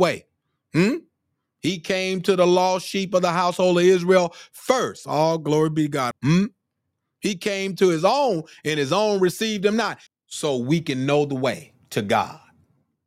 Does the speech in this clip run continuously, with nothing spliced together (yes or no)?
no